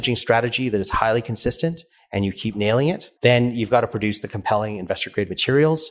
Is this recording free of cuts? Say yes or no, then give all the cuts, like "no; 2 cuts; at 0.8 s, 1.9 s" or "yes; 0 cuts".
no; 1 cut; at 3.2 s